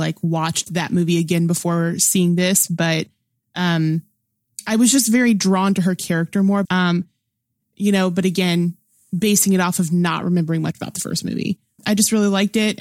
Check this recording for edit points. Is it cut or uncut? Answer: cut